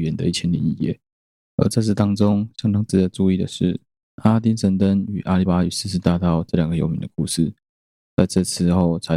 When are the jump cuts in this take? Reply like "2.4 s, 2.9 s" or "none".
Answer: 5.5 s